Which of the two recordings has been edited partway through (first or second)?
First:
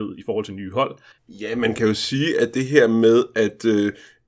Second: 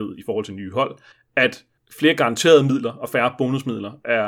first